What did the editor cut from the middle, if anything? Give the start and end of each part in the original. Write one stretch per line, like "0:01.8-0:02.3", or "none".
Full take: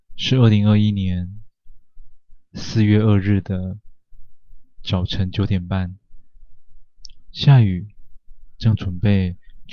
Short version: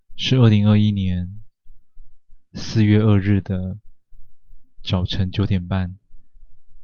none